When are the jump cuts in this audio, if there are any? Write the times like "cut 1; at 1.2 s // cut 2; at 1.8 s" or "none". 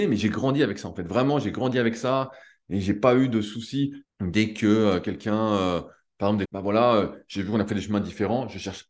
cut 1; at 4.0 s // cut 2; at 6.5 s